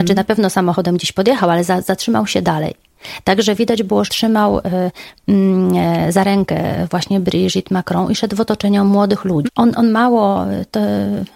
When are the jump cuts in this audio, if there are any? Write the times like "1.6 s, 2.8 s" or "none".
4.1 s, 9.5 s